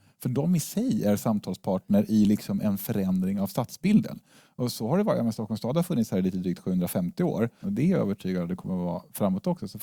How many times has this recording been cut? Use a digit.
1